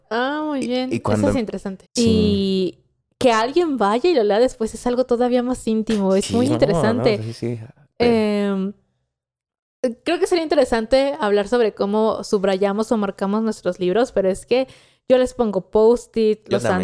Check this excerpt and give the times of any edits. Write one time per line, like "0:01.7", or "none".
0:01.8